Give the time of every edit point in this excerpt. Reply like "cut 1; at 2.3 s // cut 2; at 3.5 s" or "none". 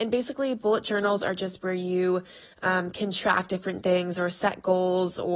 none